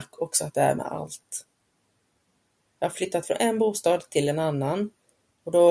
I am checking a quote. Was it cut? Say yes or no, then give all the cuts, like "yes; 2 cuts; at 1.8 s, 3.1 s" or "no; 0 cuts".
yes; 1 cut; at 2.7 s